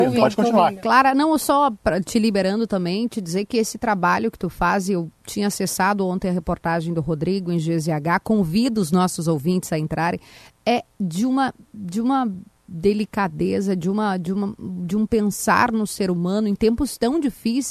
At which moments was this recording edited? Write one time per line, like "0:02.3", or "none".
0:10.9